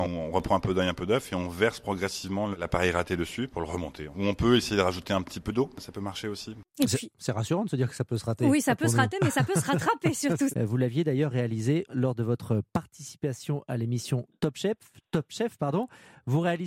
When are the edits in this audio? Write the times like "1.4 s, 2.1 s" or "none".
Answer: 10.5 s, 11.9 s